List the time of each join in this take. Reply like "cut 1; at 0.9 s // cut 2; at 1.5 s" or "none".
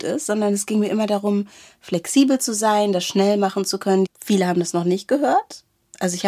cut 1; at 4.0 s